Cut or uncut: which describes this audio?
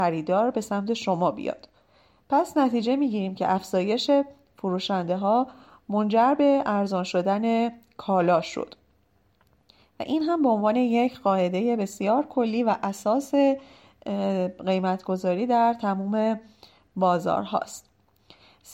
uncut